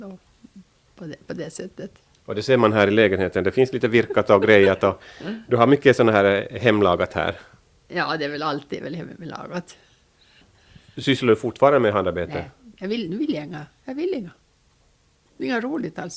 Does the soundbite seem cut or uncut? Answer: uncut